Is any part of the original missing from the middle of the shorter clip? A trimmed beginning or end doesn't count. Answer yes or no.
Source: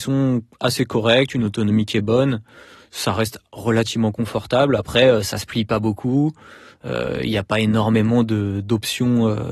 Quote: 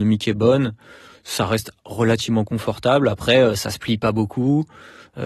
no